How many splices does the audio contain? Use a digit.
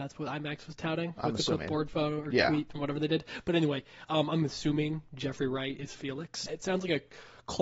1